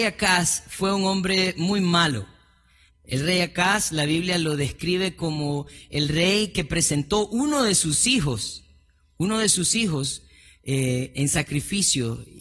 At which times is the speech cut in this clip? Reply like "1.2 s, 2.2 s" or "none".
2.9 s